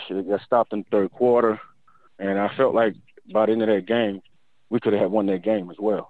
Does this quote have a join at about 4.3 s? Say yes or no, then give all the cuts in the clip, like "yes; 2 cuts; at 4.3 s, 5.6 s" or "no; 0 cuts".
no; 0 cuts